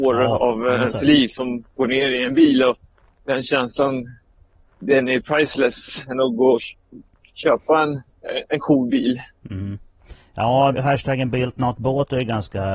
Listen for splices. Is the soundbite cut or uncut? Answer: cut